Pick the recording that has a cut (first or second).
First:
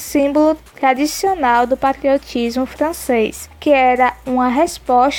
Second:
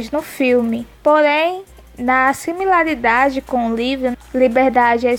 second